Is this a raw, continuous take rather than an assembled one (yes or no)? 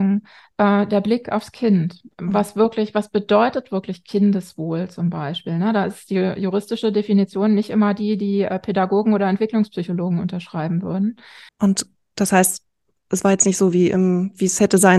no